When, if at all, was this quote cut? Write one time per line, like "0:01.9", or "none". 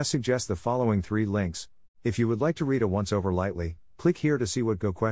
0:01.8